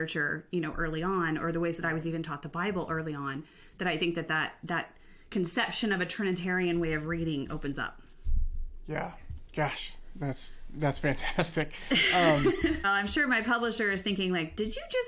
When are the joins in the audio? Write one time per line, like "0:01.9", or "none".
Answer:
0:12.8